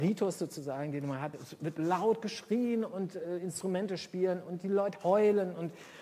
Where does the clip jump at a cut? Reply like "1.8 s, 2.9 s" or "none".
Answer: none